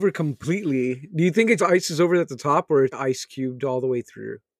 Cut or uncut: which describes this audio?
cut